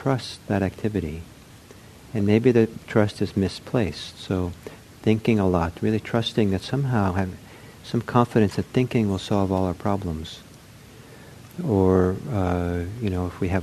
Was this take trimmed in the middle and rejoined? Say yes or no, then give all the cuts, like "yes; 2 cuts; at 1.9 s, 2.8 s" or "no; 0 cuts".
no; 0 cuts